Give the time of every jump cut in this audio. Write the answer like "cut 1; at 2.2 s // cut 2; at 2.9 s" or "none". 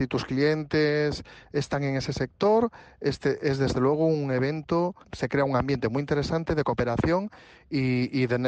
cut 1; at 5.0 s